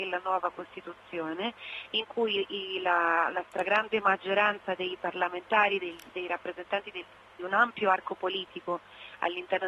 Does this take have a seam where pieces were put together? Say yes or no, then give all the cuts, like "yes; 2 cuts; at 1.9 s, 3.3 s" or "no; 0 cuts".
yes; 1 cut; at 7.3 s